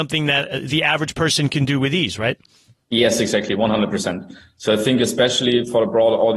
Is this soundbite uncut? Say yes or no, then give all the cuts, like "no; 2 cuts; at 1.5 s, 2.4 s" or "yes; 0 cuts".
yes; 0 cuts